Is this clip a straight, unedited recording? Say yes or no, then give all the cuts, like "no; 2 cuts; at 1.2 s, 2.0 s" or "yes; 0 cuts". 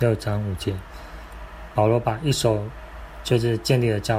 yes; 0 cuts